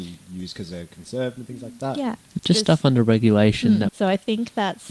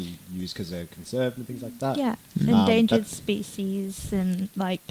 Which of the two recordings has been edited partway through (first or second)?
first